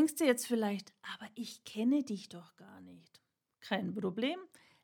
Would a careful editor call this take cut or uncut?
uncut